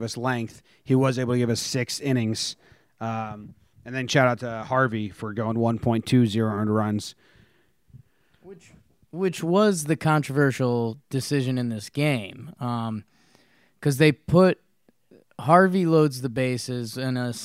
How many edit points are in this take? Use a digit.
0